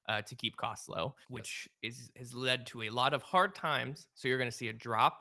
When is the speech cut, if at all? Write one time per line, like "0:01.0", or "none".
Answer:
0:01.2